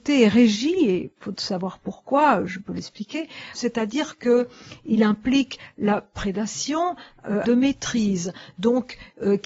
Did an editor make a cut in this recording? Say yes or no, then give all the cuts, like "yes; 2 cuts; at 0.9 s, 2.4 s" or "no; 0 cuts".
yes; 2 cuts; at 3.5 s, 7.4 s